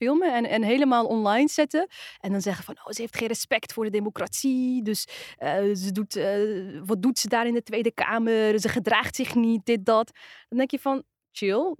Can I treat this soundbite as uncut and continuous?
yes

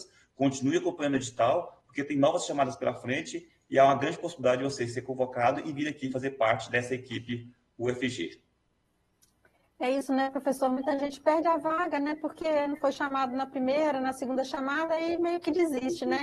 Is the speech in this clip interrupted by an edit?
no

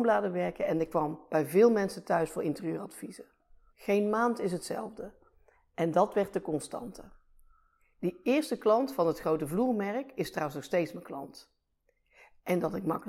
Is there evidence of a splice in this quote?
yes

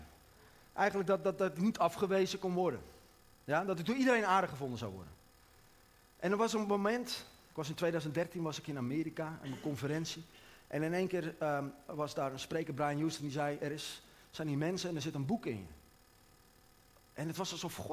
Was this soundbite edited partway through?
no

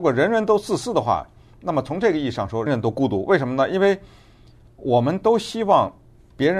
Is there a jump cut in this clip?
yes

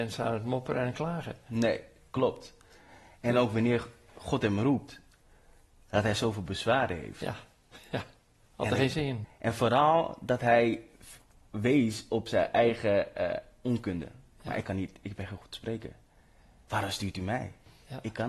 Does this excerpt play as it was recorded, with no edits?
no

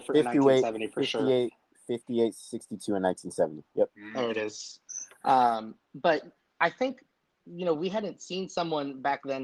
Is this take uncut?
yes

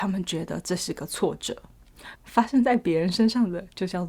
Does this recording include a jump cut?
yes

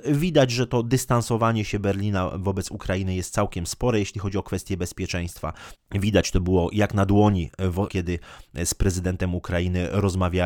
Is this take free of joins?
no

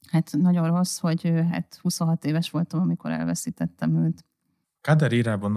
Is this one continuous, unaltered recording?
yes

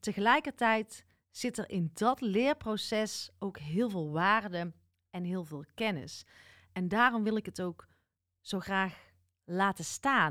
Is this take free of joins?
yes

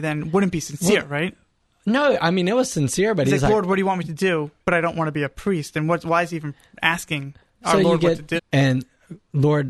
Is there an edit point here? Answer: yes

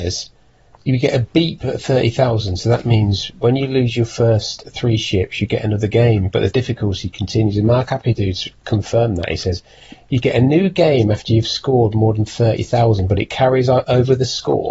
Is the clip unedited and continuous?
yes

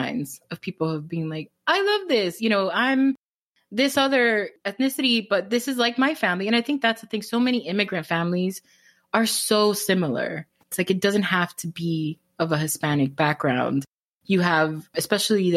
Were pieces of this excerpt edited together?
no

